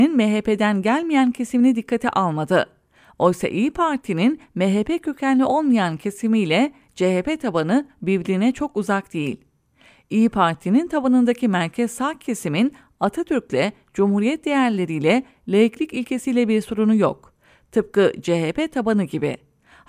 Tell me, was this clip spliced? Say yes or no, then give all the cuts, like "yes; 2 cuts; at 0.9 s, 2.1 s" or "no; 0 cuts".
no; 0 cuts